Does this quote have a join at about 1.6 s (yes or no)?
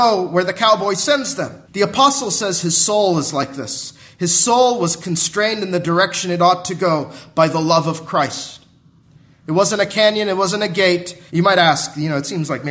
yes